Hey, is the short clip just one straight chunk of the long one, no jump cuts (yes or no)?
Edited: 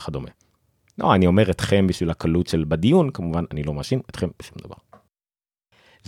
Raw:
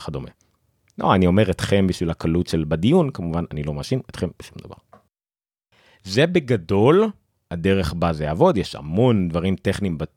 yes